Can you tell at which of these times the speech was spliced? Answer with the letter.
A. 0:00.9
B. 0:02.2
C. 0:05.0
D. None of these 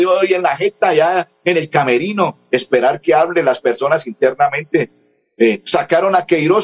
D